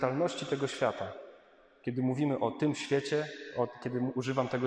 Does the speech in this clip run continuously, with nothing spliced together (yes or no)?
yes